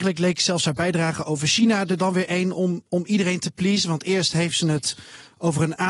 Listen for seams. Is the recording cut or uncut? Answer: uncut